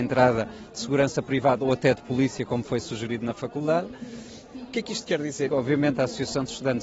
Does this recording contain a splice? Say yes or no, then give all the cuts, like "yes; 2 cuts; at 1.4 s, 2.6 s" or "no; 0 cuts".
yes; 2 cuts; at 4.5 s, 5.5 s